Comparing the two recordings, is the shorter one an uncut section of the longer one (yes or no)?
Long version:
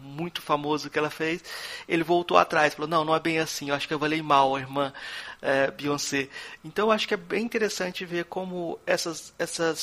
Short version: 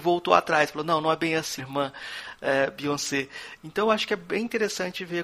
no